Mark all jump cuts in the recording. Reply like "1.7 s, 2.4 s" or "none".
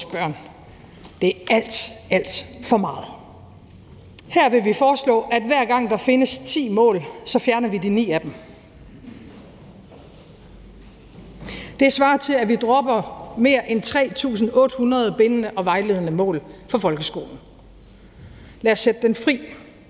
4.3 s